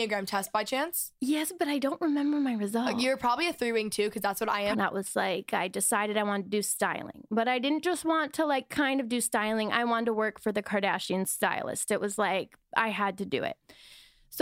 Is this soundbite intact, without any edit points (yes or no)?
no